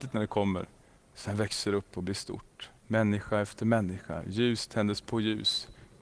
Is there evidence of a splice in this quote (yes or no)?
yes